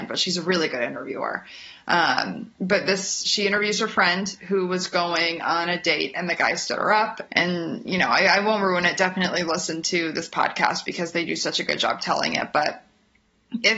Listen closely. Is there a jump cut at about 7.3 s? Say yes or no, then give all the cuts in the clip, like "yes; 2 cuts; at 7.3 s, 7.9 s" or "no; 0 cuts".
yes; 1 cut; at 7.3 s